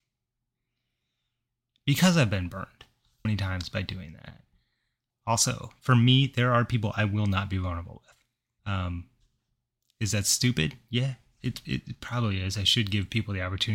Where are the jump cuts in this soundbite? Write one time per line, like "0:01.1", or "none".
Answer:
0:03.2
0:05.1
0:08.6